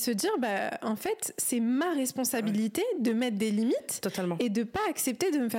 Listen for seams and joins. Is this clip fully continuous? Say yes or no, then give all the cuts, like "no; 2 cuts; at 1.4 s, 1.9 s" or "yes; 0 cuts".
yes; 0 cuts